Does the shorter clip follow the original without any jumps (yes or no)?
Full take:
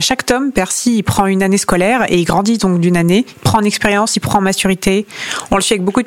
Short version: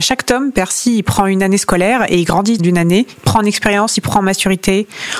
no